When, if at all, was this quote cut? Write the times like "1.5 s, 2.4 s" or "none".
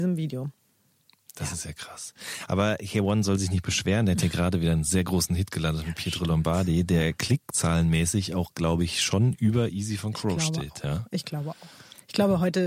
none